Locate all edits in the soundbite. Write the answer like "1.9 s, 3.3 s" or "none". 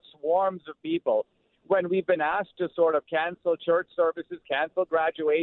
1.5 s